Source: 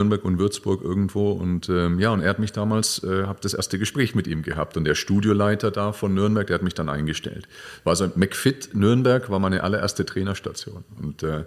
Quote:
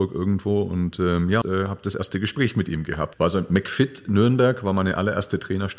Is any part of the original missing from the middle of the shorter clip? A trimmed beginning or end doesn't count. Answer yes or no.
yes